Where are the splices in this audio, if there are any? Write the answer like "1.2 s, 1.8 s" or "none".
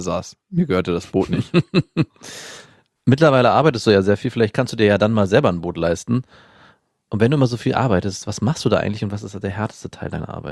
none